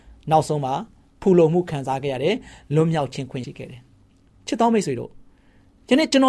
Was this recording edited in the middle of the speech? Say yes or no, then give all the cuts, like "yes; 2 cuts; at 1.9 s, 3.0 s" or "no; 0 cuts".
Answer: yes; 1 cut; at 3.4 s